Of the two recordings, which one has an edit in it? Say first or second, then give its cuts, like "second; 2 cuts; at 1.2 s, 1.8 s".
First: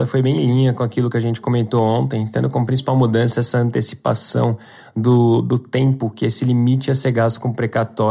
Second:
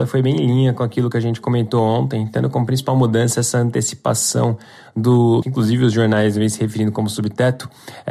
second; 1 cut; at 5.4 s